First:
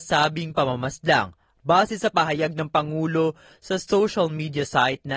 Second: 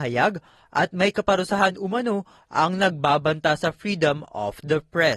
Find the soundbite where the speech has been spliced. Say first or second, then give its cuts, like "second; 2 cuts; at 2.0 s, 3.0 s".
first; 1 cut; at 1.5 s